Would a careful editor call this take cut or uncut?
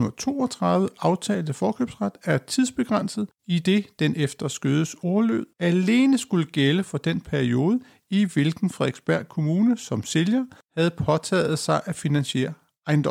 uncut